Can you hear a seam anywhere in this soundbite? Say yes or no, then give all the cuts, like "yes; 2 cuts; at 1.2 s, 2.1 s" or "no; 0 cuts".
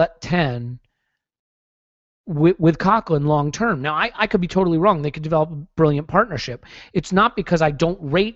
no; 0 cuts